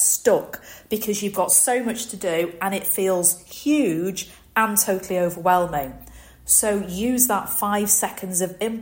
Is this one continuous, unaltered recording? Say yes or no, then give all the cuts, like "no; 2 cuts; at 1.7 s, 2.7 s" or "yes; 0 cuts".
yes; 0 cuts